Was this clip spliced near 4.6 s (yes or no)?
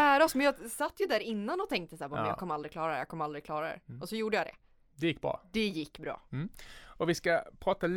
no